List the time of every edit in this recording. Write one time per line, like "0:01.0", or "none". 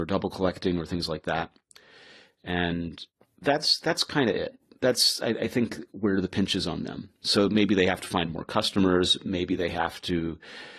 none